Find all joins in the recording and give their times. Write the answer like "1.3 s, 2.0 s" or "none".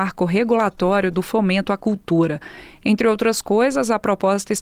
none